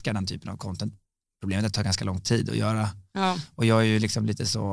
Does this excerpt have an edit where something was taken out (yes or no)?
no